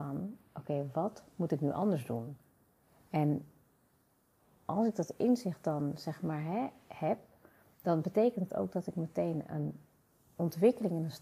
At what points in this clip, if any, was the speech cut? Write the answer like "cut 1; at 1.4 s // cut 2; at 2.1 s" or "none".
none